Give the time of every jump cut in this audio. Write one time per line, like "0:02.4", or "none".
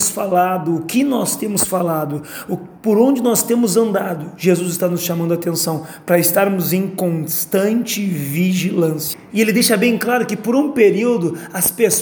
0:09.3

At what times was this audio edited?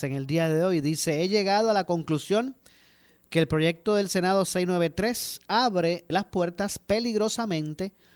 0:06.1

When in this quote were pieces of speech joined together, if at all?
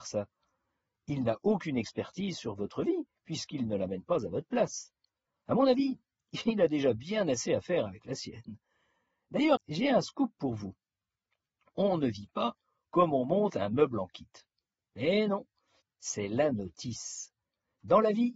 0:09.6
0:15.8

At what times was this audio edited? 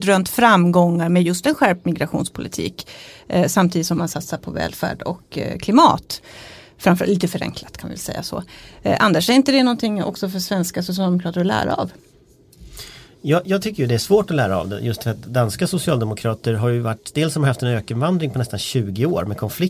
none

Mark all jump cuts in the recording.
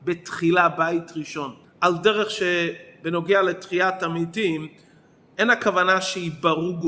0:01.6

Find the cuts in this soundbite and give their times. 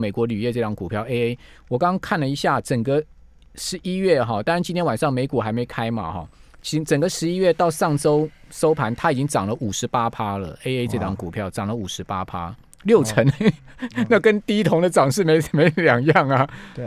none

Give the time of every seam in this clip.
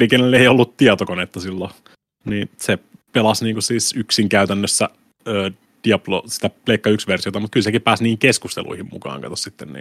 none

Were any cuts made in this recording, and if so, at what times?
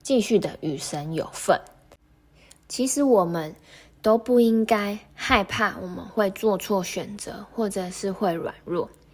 none

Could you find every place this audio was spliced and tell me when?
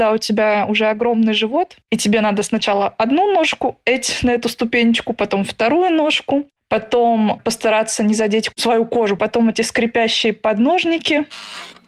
0:09.2

